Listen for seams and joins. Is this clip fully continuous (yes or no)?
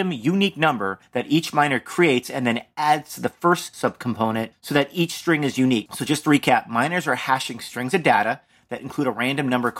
yes